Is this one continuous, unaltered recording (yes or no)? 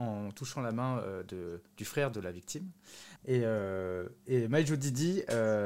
no